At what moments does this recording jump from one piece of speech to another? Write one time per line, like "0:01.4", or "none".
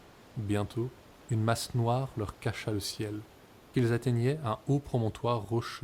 0:03.7